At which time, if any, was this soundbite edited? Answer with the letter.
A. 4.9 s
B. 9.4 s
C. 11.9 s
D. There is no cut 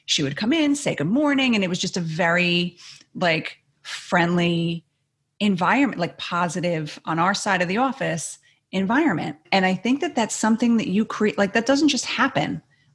B